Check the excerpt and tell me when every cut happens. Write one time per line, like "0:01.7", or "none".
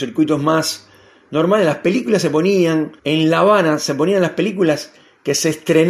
0:03.0